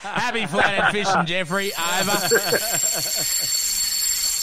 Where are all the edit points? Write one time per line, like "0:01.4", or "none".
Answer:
none